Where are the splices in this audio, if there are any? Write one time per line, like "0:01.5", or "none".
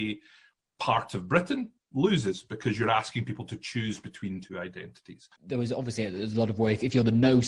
0:05.4